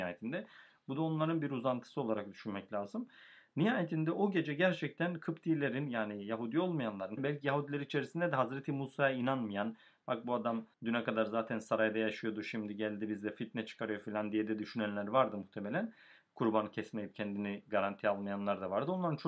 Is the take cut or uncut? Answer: cut